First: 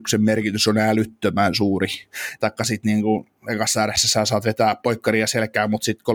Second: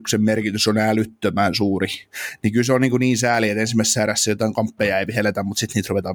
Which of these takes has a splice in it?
first; 1 cut; at 2.4 s

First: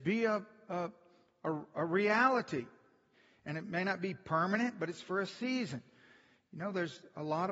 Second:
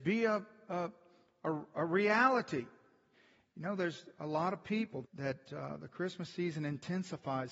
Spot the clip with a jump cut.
second; 2 cuts; at 3.4 s, 5.0 s

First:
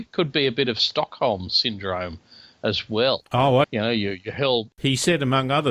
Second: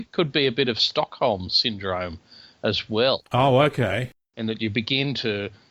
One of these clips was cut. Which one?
first; 2 cuts; at 3.6 s, 4.7 s

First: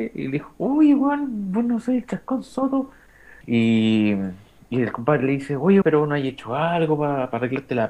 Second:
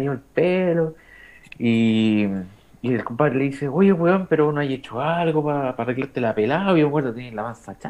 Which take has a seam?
first; 2 cuts; at 3.4 s, 5.8 s

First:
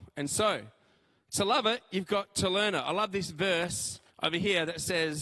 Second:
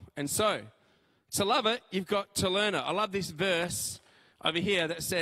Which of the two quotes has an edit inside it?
first; 1 cut; at 4.1 s

